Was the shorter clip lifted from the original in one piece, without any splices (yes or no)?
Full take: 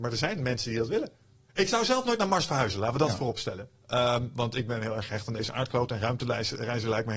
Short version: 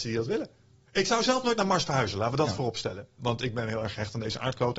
no